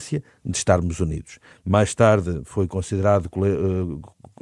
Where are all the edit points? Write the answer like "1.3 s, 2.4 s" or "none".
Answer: 1.5 s